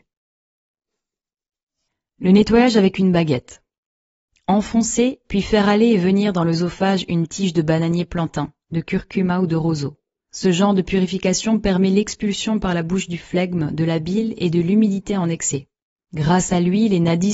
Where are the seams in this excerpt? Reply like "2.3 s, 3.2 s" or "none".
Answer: 10.3 s, 16.1 s